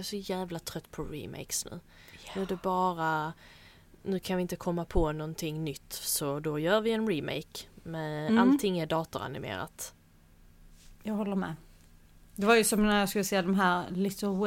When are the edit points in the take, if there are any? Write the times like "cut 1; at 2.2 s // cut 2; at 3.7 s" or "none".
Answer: none

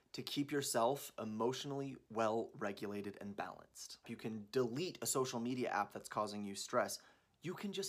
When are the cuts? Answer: cut 1; at 4.0 s

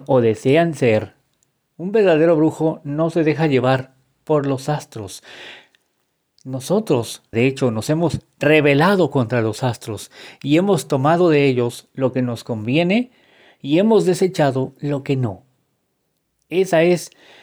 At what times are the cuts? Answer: cut 1; at 7.3 s

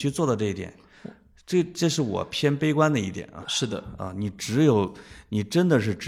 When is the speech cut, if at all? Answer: cut 1; at 3.4 s

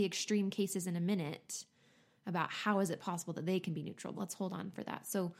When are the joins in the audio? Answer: cut 1; at 4.2 s

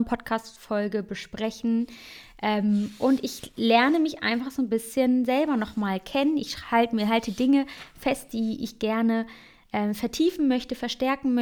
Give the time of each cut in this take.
none

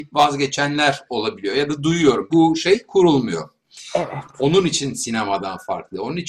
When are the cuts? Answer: cut 1; at 2.3 s

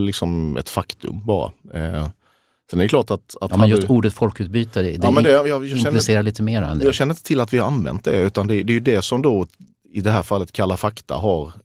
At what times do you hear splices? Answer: none

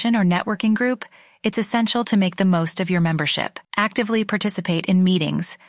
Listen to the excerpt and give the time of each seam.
cut 1; at 3.6 s

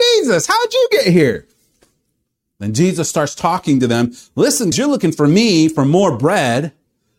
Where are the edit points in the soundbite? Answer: cut 1; at 4.7 s

